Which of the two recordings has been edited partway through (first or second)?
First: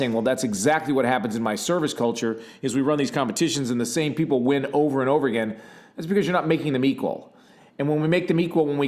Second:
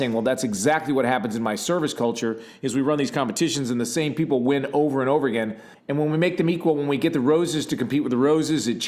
second